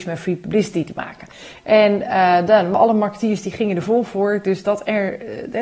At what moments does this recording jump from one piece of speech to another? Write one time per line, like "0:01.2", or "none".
none